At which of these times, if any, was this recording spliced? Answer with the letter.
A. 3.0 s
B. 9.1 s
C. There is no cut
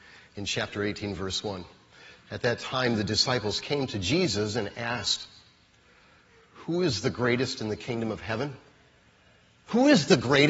C